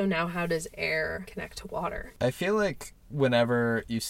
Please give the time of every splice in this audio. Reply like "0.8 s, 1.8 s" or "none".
none